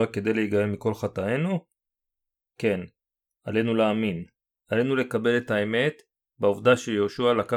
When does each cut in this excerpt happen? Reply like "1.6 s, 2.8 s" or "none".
none